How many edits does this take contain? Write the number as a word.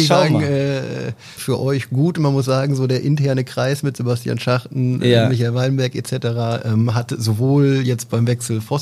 one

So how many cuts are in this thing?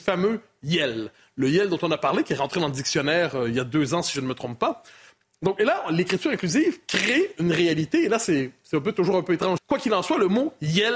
one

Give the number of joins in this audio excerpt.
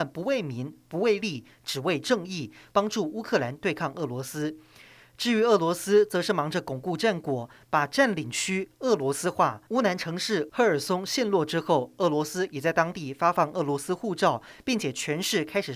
one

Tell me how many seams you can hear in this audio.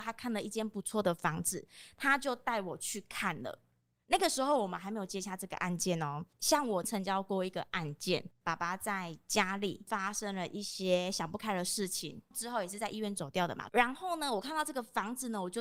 three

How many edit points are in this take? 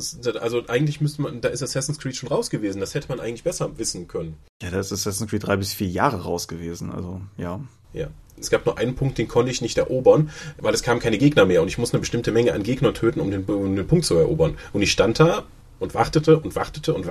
one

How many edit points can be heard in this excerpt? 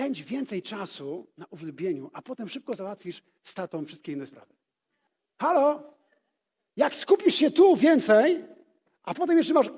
zero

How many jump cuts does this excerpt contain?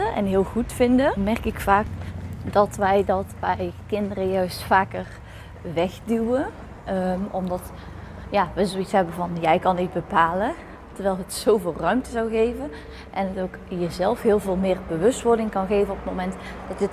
one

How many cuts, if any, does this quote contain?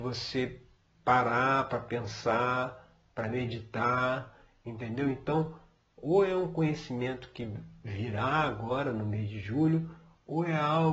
zero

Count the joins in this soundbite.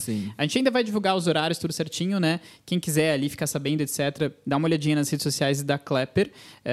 zero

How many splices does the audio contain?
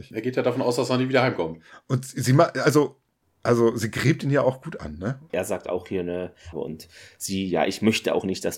two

